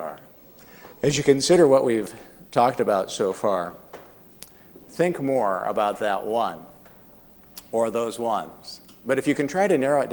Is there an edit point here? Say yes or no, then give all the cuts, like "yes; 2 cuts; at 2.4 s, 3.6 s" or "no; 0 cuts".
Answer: yes; 1 cut; at 0.9 s